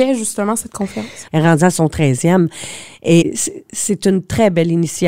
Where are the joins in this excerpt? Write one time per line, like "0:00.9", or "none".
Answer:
0:01.3
0:03.2